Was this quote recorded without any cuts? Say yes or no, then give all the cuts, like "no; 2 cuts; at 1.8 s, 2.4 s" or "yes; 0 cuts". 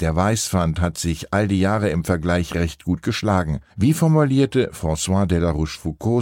no; 1 cut; at 3.7 s